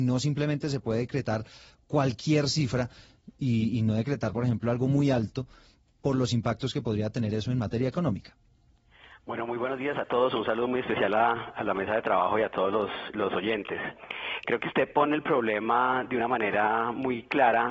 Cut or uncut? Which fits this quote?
uncut